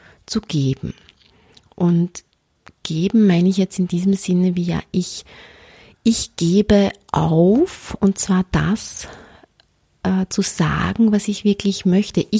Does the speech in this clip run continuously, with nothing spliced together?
yes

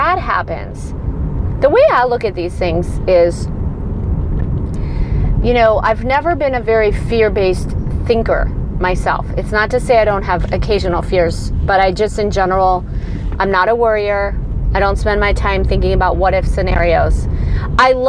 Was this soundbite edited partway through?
no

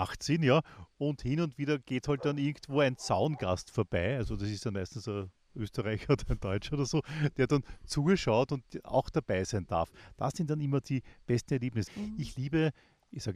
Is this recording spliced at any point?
yes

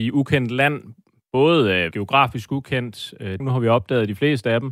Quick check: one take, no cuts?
no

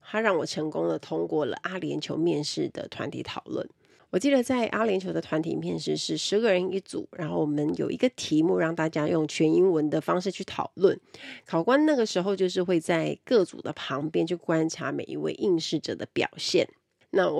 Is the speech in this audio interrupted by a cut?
no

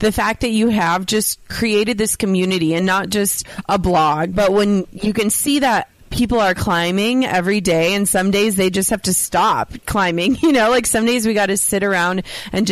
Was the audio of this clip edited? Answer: yes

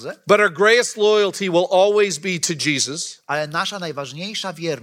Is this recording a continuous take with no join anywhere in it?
yes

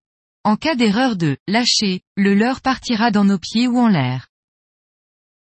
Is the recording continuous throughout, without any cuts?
no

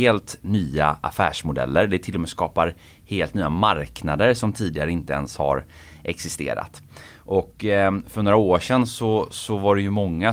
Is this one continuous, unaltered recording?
yes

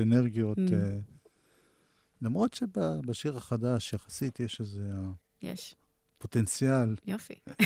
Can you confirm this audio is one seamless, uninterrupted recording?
yes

